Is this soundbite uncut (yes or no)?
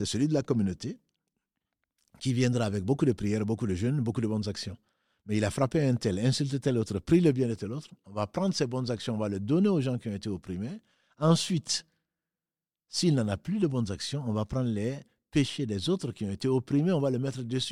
yes